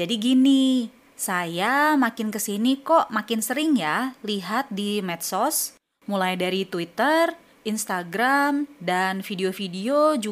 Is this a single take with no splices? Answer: yes; 0 cuts

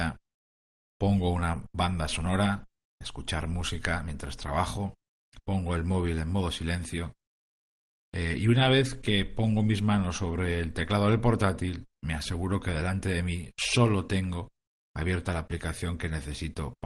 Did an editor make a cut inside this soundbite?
no; 0 cuts

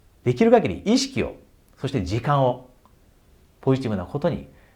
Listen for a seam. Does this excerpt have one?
no; 0 cuts

